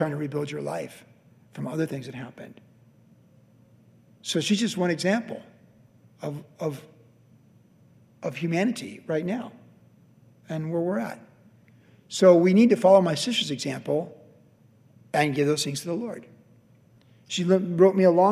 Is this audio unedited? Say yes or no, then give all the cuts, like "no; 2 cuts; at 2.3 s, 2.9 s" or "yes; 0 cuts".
yes; 0 cuts